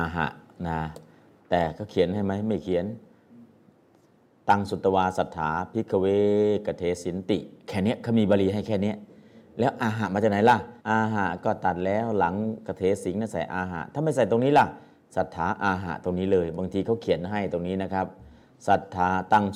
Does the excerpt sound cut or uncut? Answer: cut